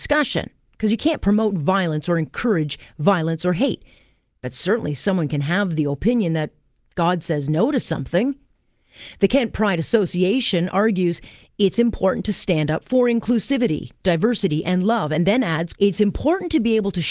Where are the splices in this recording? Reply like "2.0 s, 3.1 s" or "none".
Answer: 15.7 s